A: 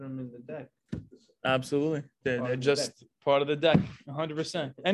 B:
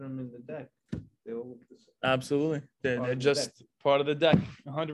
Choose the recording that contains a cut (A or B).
A